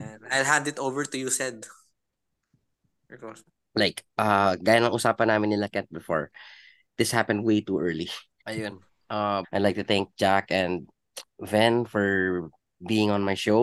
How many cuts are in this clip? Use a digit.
3